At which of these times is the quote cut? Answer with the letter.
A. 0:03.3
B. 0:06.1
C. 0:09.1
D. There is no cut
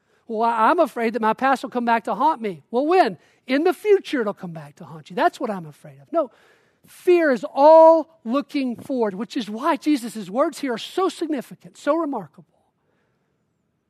C